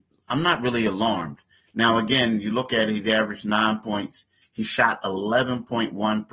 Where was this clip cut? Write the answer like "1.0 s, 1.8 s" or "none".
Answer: none